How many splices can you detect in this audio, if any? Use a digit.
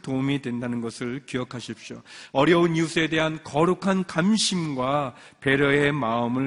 1